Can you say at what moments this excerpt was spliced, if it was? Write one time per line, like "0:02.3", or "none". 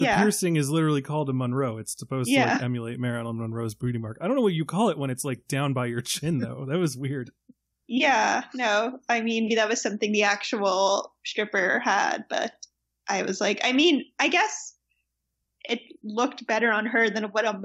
0:09.5